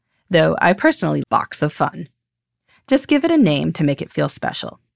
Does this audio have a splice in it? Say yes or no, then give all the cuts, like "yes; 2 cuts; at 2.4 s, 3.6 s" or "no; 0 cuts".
yes; 1 cut; at 1.2 s